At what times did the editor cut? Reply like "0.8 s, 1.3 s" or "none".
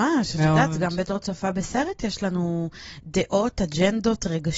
none